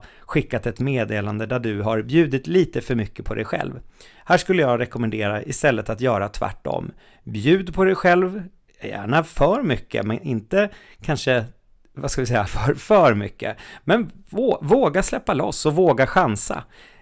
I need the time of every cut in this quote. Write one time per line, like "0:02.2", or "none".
0:12.5